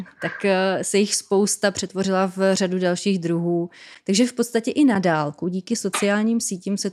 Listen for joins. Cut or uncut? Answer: cut